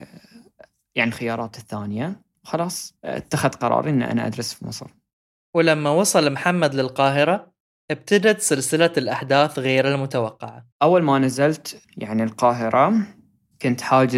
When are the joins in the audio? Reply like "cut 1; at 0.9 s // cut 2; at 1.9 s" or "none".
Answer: cut 1; at 10.7 s